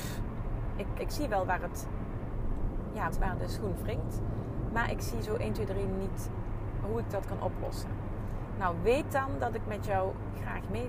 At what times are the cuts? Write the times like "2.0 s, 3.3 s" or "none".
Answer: 1.0 s, 3.1 s